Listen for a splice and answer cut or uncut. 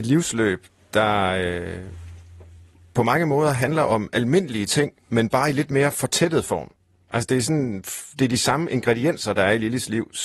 uncut